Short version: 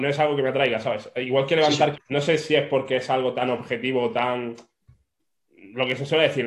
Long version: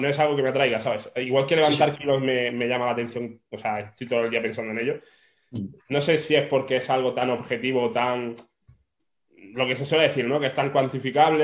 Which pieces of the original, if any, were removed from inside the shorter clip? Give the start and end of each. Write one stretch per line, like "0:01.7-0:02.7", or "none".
0:02.0-0:05.8